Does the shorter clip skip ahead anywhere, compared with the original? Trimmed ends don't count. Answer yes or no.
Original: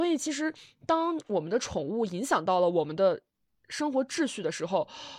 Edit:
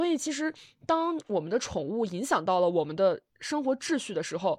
yes